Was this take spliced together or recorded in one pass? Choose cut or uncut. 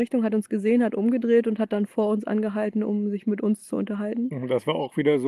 uncut